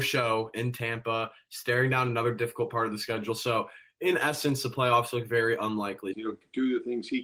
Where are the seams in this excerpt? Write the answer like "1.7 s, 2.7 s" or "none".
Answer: 6.1 s